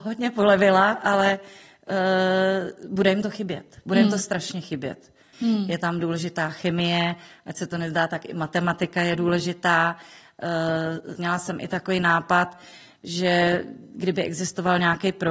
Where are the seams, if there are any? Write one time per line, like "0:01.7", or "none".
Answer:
0:05.3
0:11.2